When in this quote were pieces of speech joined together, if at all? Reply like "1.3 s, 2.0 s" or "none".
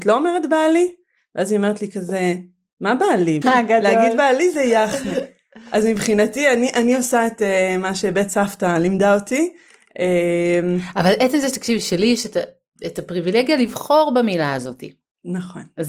3.4 s